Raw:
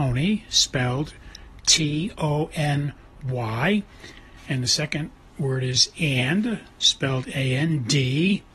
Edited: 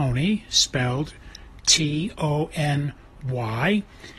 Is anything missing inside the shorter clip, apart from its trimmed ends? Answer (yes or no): no